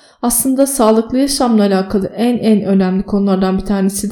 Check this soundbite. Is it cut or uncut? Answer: uncut